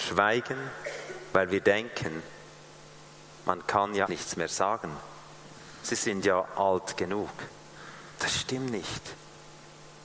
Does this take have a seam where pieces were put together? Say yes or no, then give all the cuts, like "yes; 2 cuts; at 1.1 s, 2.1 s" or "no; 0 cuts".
yes; 1 cut; at 4.1 s